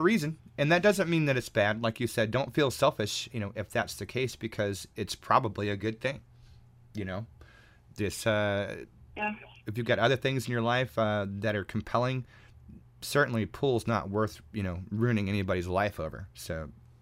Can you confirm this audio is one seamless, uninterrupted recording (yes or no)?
no